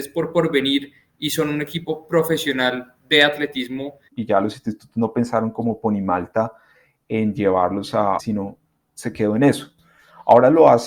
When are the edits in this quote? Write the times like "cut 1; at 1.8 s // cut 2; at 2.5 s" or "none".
cut 1; at 4.1 s // cut 2; at 8.2 s